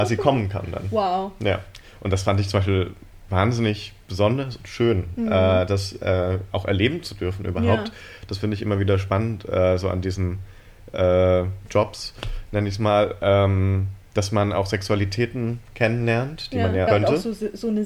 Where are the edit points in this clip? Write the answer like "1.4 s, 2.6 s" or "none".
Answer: 14.1 s, 16.9 s